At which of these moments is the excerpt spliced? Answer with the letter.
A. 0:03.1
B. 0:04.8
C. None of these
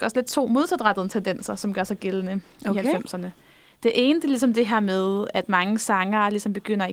C